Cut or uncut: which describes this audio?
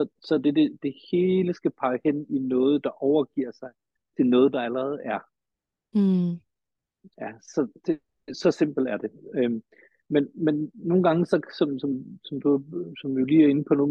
uncut